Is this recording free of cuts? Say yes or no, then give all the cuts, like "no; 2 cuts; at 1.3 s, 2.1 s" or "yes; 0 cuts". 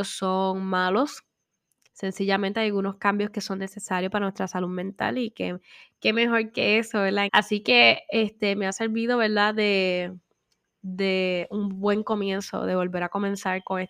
no; 1 cut; at 7.3 s